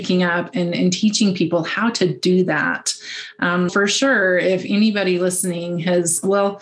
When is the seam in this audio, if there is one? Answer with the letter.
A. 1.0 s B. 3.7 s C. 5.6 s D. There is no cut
B